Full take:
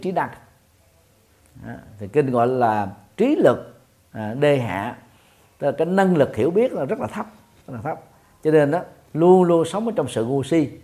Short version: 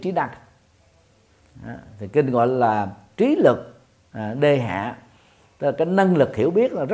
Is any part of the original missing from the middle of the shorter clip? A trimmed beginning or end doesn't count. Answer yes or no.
no